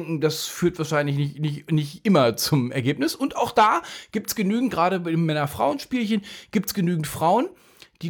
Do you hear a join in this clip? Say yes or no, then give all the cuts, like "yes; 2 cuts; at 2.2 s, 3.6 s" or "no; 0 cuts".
no; 0 cuts